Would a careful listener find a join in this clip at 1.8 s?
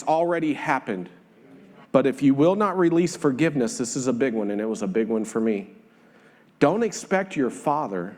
yes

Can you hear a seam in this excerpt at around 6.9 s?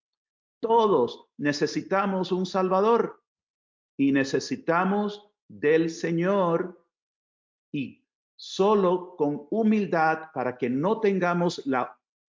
no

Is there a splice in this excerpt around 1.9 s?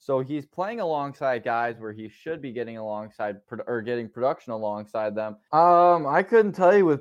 no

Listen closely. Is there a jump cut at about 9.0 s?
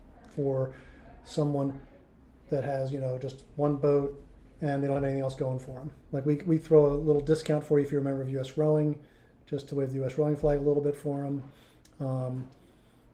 no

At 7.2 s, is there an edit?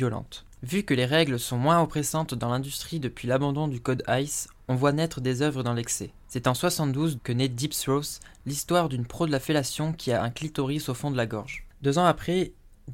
yes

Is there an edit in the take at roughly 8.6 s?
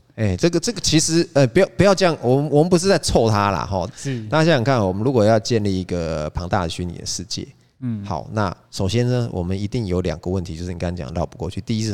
yes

